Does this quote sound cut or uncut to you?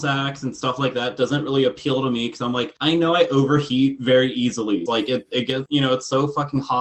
cut